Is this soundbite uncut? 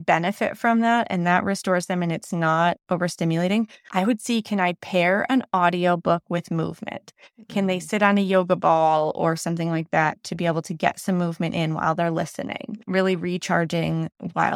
yes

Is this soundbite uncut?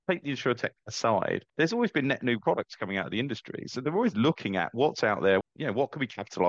no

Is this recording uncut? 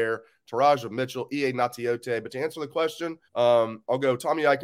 no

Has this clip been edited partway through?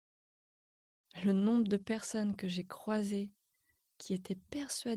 no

